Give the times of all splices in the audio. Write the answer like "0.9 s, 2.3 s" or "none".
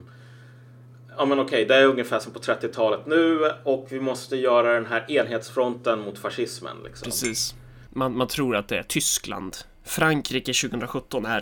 none